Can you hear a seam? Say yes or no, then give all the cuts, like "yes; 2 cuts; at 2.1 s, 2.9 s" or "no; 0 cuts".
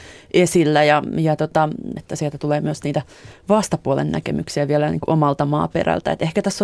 yes; 1 cut; at 2.0 s